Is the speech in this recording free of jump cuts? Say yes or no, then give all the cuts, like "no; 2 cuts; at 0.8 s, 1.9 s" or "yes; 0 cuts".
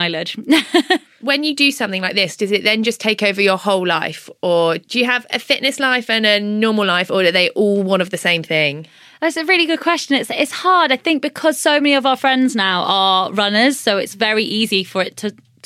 yes; 0 cuts